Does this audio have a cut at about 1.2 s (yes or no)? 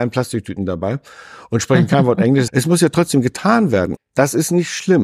no